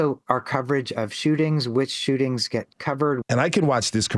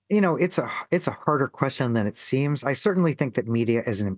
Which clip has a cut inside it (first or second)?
first